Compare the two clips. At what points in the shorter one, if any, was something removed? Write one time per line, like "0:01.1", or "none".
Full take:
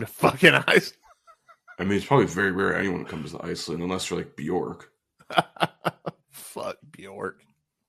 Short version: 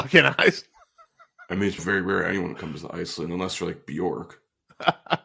0:01.8